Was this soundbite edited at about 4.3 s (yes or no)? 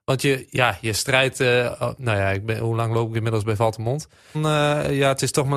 yes